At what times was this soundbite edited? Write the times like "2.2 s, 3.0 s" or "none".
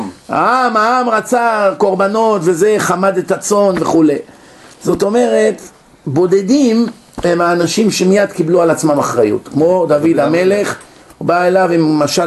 none